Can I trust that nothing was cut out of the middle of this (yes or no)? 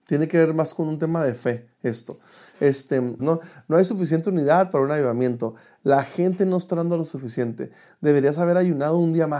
no